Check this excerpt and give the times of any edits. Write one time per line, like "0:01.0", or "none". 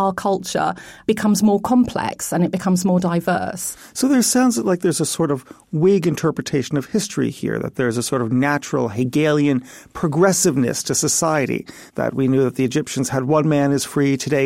none